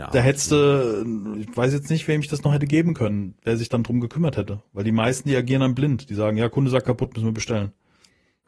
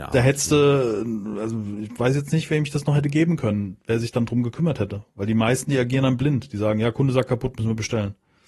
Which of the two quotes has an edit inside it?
first; 1 cut; at 1.3 s

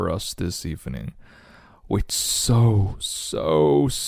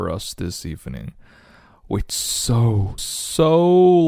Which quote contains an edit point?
second; 1 cut; at 3.0 s

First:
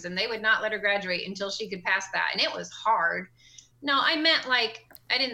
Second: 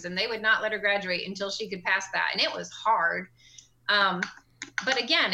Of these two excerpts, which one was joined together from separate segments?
first; 1 cut; at 3.7 s

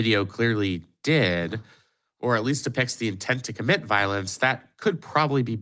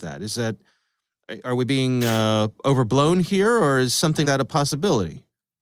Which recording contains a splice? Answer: second; 1 cut; at 4.2 s

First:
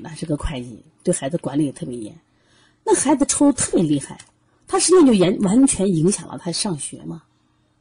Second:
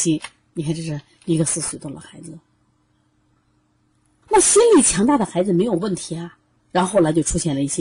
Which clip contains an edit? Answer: second; 2 cuts; at 4.2 s, 6.6 s

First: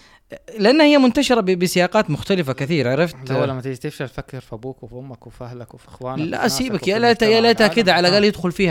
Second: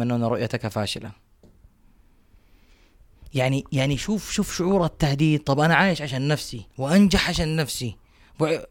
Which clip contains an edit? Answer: second; 1 cut; at 6.7 s

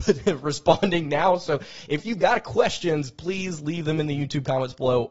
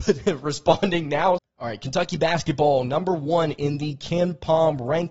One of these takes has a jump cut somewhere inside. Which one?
second; 1 cut; at 1.4 s

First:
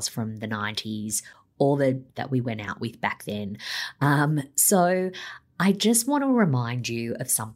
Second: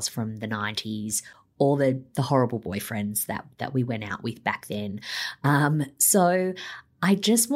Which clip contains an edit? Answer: first; 1 cut; at 2.1 s

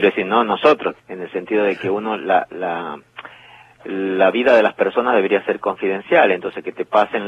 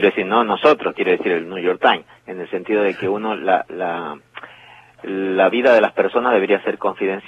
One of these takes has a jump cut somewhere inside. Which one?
first; 1 cut; at 1.0 s

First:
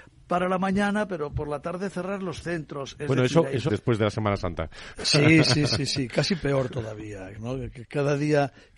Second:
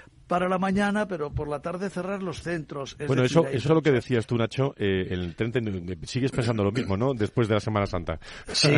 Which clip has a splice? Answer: first; 2 cuts; at 3.7 s, 7.3 s

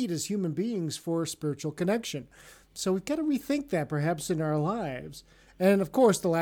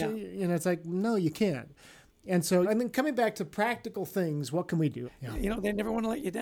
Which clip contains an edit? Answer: second; 2 cuts; at 2.6 s, 5.1 s

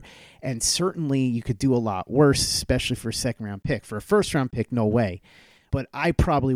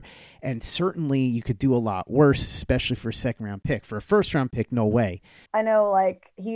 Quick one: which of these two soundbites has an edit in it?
second; 1 cut; at 5.5 s

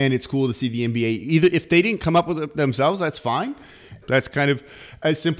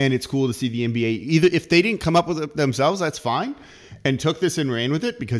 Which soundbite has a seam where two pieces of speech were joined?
first; 1 cut; at 4.0 s

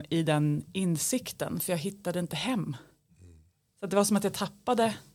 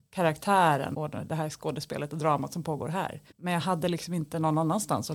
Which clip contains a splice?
second; 2 cuts; at 0.9 s, 3.3 s

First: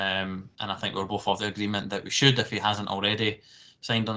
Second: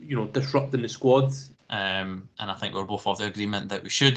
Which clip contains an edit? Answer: second; 1 cut; at 1.5 s

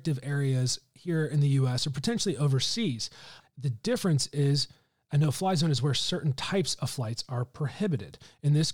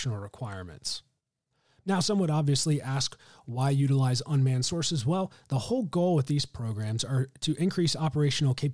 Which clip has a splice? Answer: first; 1 cut; at 3.4 s

